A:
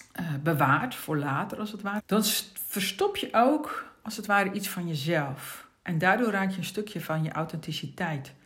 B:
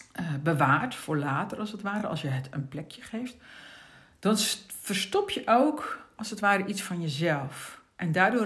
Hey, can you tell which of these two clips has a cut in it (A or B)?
A